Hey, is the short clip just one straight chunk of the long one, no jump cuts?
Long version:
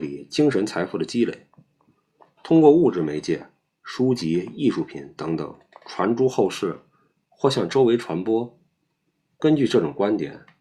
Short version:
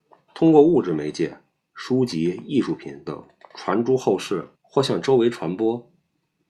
no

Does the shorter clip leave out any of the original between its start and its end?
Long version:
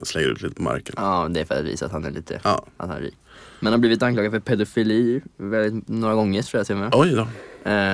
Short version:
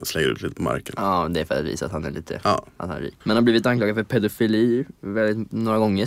yes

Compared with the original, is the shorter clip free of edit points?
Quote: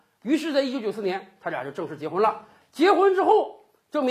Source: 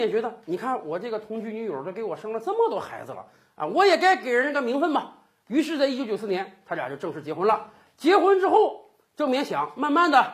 yes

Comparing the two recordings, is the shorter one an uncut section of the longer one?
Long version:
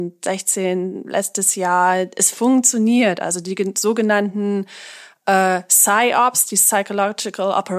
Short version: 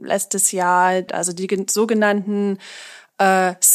no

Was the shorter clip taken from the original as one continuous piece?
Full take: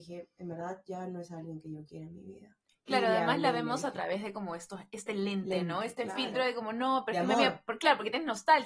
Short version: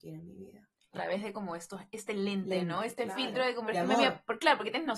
no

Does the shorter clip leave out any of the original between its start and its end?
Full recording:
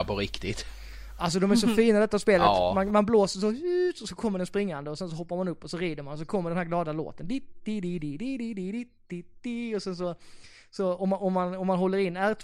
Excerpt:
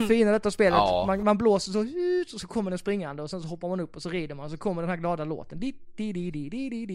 no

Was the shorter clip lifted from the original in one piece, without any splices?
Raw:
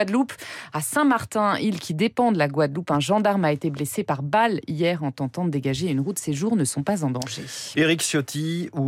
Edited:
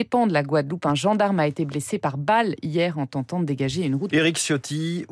no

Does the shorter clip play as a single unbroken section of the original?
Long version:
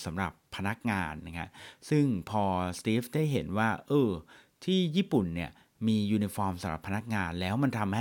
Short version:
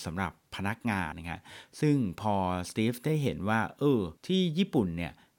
no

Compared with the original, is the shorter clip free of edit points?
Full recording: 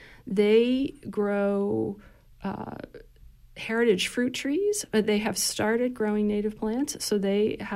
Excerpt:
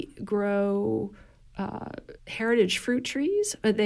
no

